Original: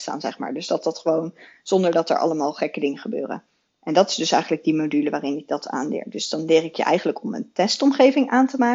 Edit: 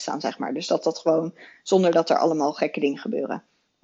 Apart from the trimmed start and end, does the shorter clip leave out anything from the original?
no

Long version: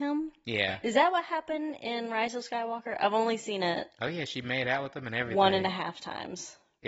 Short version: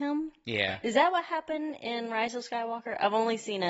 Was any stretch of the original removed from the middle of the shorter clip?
no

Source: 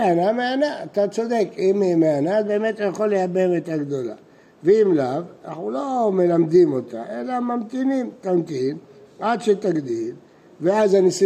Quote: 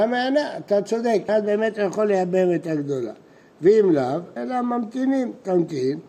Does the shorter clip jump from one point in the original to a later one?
yes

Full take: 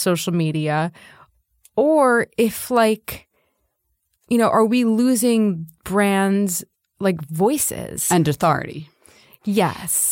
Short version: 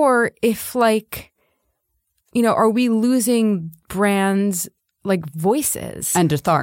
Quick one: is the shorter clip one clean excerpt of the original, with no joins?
yes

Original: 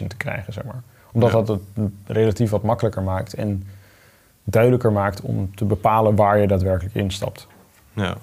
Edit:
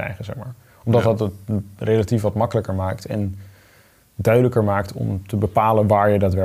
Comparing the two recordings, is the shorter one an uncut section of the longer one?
yes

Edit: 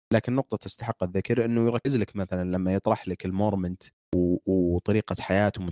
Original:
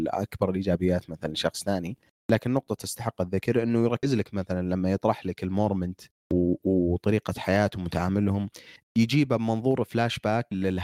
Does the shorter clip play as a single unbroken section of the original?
yes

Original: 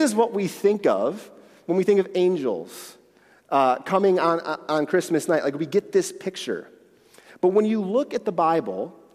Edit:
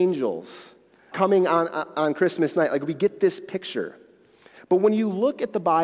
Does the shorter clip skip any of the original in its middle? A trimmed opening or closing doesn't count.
yes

